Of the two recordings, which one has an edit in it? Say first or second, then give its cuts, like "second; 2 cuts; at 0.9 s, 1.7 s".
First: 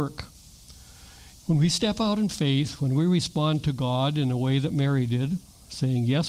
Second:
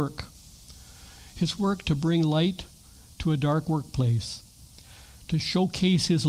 first; 2 cuts; at 1.3 s, 2.8 s